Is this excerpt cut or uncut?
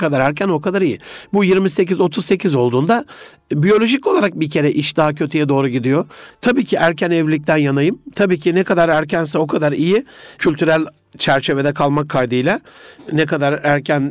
cut